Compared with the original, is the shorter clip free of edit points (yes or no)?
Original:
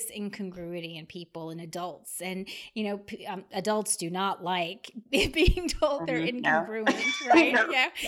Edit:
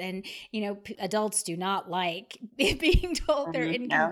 no